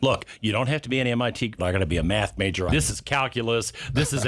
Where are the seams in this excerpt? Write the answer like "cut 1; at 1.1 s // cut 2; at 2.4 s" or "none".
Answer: cut 1; at 1.6 s // cut 2; at 2.7 s